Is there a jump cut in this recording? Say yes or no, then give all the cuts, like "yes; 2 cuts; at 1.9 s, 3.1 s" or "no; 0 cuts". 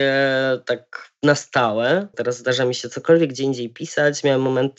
yes; 1 cut; at 2.1 s